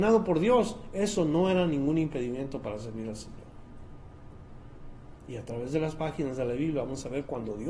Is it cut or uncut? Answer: uncut